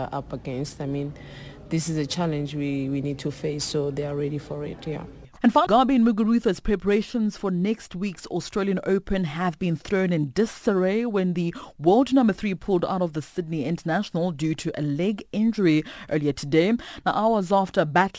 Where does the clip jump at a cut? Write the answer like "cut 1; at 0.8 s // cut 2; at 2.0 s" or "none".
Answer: cut 1; at 5.7 s